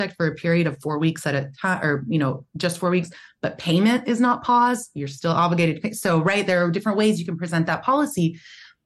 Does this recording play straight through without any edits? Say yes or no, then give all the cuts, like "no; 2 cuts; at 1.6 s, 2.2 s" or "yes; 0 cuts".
yes; 0 cuts